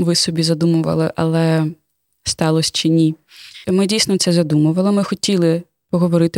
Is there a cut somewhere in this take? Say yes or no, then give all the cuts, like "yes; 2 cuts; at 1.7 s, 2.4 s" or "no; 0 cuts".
yes; 1 cut; at 3.6 s